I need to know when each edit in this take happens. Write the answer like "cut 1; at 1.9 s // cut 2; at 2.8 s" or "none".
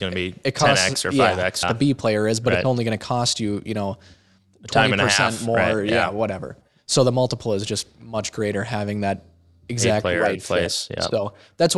cut 1; at 1.6 s